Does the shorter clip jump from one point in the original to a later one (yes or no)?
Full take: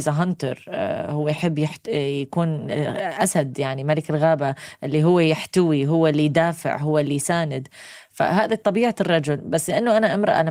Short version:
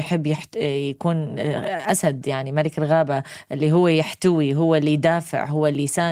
no